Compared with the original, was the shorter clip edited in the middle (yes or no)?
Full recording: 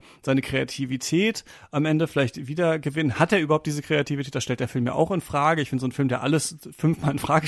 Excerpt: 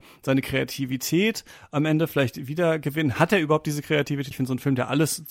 yes